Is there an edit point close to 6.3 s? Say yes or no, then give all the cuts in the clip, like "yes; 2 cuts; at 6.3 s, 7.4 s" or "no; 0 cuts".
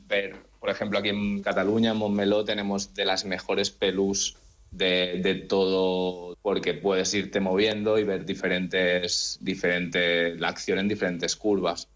yes; 1 cut; at 6.3 s